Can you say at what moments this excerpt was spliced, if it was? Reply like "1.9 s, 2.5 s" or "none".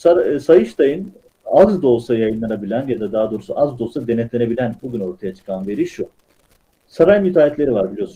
4.8 s